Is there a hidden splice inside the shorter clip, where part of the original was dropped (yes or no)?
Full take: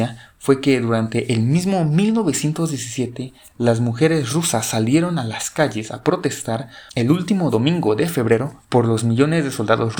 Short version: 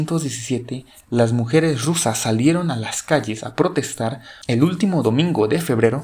no